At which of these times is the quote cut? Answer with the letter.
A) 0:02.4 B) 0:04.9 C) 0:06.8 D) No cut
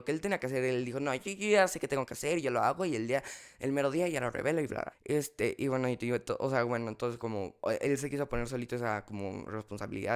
B